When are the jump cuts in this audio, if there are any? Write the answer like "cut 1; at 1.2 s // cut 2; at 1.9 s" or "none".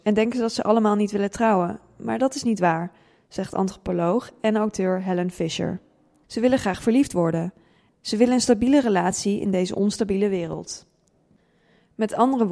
cut 1; at 6.2 s // cut 2; at 7.9 s